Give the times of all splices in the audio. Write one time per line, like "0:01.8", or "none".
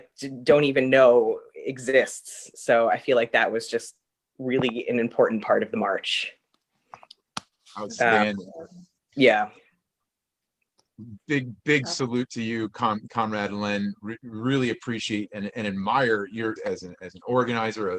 0:16.6